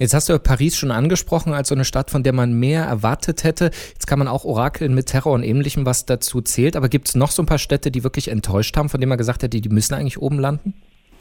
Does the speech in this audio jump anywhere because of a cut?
no; 0 cuts

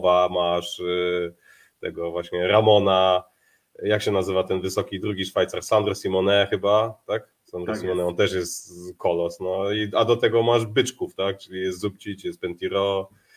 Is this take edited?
no; 0 cuts

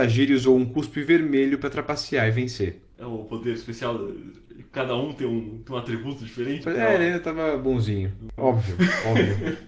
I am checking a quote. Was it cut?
yes; 2 cuts; at 6.6 s, 8.4 s

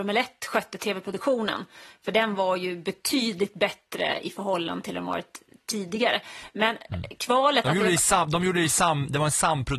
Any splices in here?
no; 0 cuts

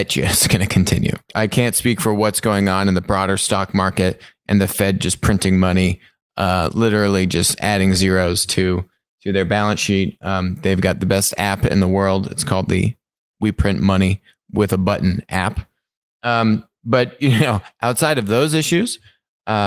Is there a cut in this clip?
no; 0 cuts

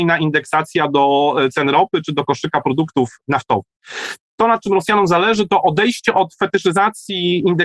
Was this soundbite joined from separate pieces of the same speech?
no; 0 cuts

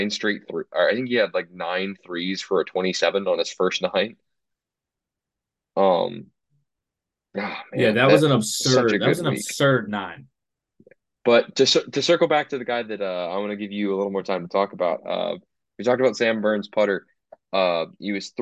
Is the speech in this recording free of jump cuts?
yes; 0 cuts

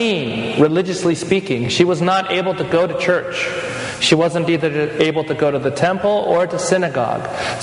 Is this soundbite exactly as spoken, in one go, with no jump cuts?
yes; 0 cuts

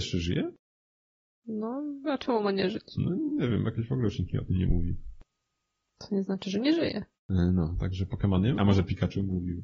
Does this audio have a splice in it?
yes; 2 cuts; at 7.2 s, 8.6 s

